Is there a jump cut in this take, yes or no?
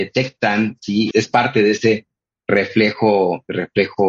yes